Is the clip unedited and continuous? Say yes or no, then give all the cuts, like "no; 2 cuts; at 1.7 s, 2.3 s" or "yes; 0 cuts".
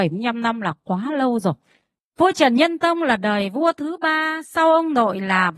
no; 1 cut; at 2.0 s